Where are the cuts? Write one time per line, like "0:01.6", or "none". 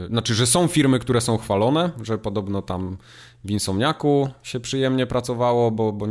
0:01.9